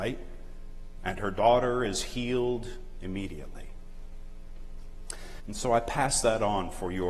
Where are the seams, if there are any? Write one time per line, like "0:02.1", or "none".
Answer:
0:01.0
0:05.4